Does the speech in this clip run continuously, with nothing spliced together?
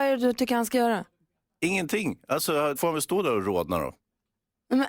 no; 1 cut; at 2.8 s

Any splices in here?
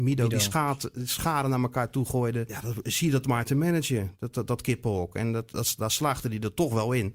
no; 0 cuts

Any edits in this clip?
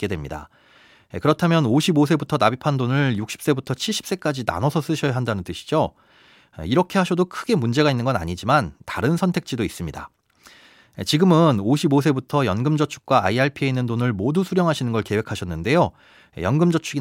no; 0 cuts

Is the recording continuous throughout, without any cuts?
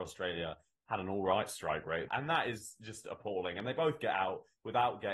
no; 1 cut; at 2.1 s

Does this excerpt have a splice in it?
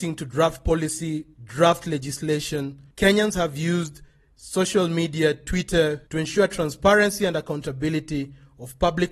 yes; 1 cut; at 6.1 s

